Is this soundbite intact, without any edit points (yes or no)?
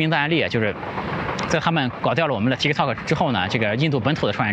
yes